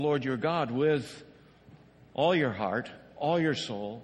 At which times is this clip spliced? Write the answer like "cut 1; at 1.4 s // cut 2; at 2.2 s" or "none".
none